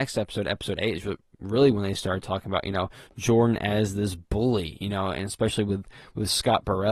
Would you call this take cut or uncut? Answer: uncut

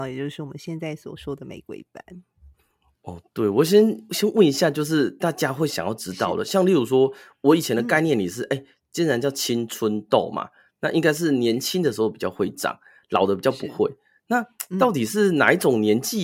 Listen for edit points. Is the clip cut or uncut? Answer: uncut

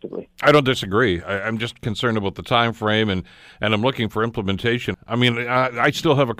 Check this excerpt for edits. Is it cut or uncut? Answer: cut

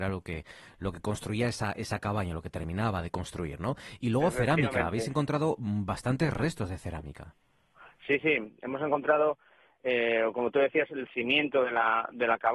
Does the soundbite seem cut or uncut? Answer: uncut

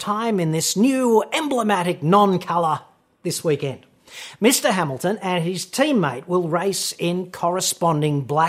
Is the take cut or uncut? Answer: uncut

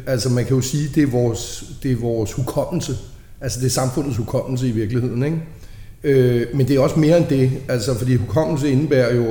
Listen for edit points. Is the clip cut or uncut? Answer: uncut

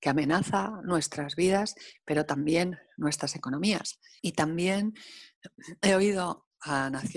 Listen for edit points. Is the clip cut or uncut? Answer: cut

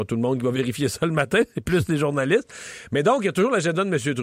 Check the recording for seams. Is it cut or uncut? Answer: uncut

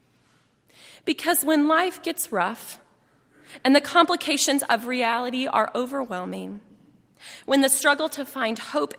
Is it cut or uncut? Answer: uncut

